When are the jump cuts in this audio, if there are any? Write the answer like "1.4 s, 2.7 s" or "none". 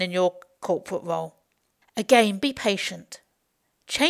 1.8 s